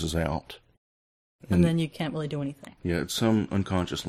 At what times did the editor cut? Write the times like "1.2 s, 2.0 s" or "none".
2.8 s

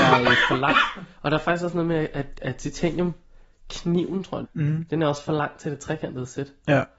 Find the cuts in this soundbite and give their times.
4.4 s

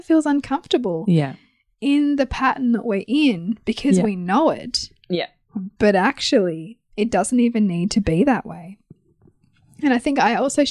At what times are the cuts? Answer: none

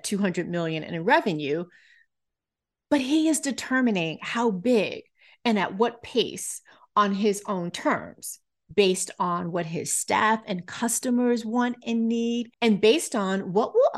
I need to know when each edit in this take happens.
8.6 s, 12.5 s

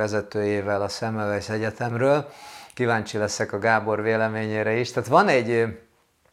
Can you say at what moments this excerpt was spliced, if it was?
none

